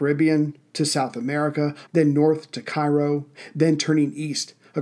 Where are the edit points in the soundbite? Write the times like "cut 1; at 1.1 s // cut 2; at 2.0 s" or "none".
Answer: cut 1; at 1.9 s